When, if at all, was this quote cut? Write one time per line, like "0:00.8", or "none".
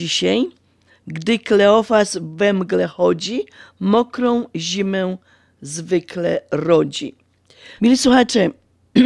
0:07.8